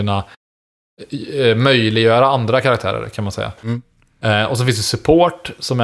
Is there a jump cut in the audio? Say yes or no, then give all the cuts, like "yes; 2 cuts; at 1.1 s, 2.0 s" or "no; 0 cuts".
no; 0 cuts